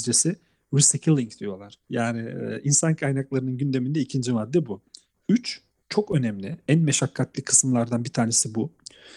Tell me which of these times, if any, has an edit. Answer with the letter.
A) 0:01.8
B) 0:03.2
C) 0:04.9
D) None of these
A